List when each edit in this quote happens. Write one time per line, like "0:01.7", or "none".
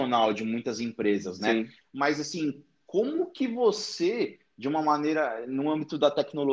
0:01.8